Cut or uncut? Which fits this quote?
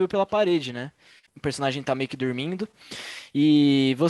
cut